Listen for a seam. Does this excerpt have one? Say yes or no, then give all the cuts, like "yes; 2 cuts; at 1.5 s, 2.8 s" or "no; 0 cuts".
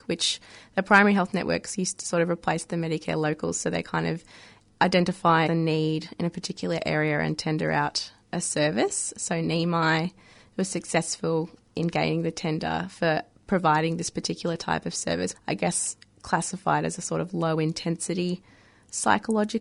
yes; 2 cuts; at 5.5 s, 15.3 s